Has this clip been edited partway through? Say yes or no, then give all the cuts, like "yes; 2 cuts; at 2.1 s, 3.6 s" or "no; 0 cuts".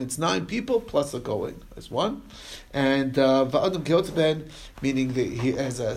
yes; 1 cut; at 4.7 s